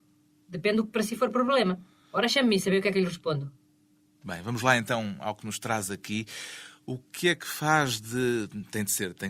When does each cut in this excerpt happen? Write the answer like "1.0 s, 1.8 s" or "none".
none